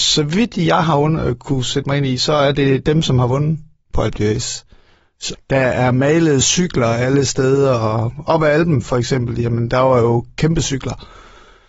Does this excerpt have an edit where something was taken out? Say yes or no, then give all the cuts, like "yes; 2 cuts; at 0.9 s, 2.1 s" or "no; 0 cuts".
yes; 1 cut; at 5.3 s